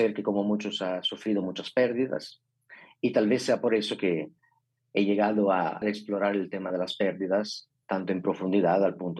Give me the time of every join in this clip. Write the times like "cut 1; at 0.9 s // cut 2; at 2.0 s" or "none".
cut 1; at 5.8 s // cut 2; at 7.8 s